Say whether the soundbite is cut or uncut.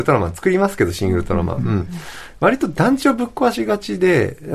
uncut